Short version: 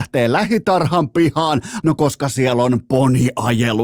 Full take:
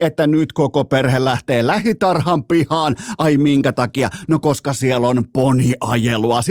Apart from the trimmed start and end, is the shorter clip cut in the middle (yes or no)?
yes